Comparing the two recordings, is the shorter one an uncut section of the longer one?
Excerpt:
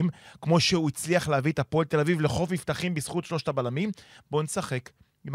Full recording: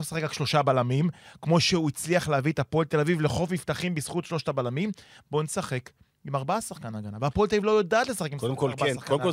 yes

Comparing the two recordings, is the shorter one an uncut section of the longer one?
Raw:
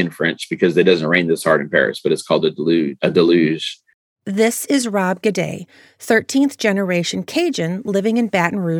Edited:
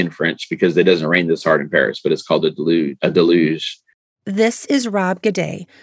yes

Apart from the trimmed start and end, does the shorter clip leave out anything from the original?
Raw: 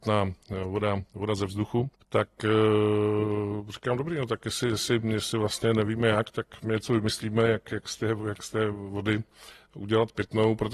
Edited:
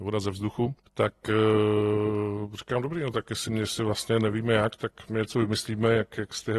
yes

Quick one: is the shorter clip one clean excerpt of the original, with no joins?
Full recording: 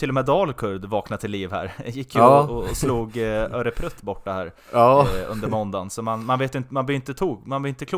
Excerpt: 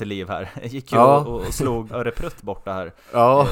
no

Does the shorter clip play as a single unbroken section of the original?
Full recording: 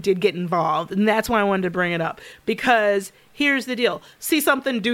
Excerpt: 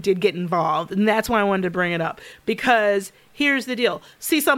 yes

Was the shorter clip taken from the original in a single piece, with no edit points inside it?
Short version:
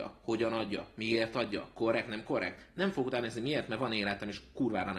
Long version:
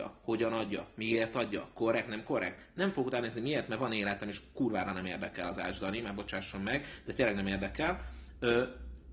yes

